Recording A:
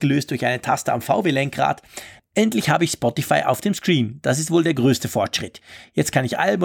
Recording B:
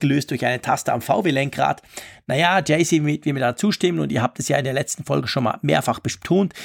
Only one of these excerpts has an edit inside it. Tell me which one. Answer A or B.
A